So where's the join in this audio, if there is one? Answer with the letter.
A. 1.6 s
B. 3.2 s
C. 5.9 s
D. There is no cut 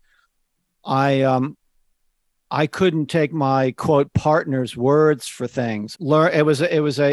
C